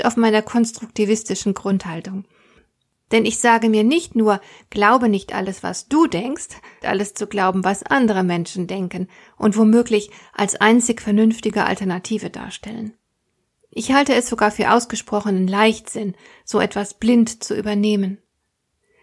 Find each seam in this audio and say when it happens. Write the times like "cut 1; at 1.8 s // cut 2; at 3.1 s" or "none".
cut 1; at 6.8 s